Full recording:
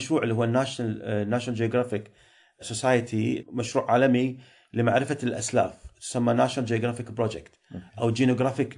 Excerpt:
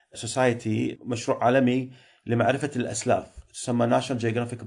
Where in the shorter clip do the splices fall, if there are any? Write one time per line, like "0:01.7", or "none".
none